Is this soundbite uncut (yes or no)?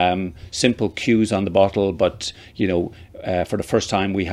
yes